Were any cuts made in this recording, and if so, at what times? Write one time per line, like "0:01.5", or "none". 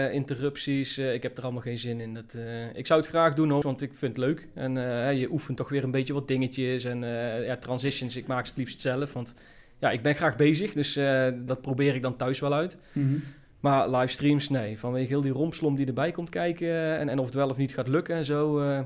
0:03.6
0:11.5